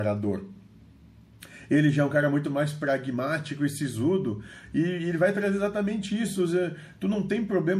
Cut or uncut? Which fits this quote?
uncut